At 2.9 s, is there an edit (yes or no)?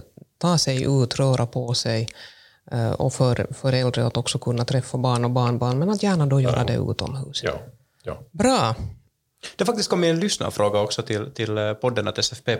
no